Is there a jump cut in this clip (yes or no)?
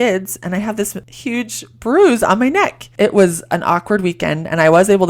no